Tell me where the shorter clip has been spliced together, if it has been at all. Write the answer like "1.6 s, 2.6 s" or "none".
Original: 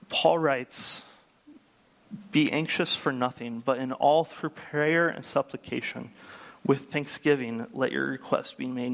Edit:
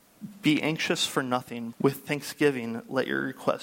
1.7 s